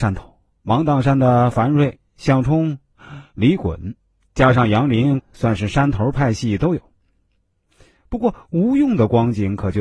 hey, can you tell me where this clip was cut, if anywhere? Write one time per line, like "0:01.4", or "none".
0:05.2